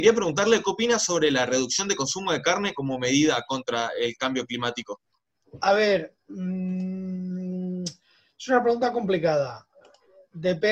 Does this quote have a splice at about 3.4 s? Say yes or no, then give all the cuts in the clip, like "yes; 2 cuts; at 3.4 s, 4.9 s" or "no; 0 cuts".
no; 1 cut; at 5.5 s